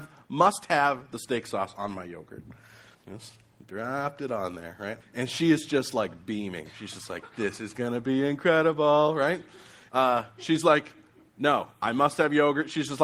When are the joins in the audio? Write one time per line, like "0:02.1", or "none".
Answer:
0:02.9
0:05.0
0:09.9